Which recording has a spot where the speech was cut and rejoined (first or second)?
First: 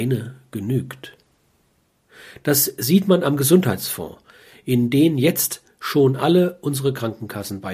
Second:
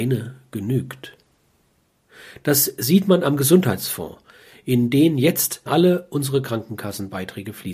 second